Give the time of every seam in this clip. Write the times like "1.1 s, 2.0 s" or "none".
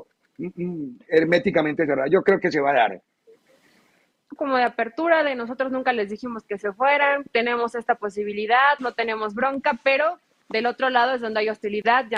4.4 s, 8.8 s